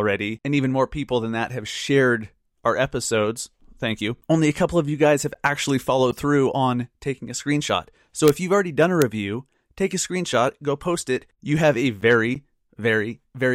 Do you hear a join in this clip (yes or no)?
no